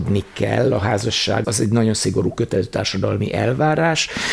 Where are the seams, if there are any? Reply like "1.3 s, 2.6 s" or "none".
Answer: 1.4 s